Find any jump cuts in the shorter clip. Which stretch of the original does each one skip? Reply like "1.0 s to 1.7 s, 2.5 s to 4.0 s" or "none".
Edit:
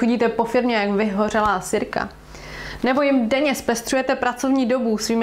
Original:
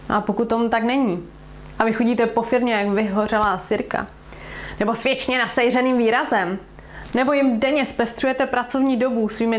4.8 s to 7.1 s